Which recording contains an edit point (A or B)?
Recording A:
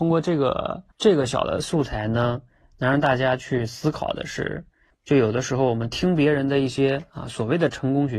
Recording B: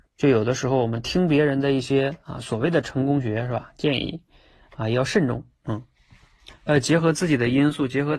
A